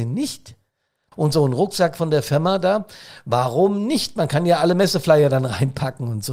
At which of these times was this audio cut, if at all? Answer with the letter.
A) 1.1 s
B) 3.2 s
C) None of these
A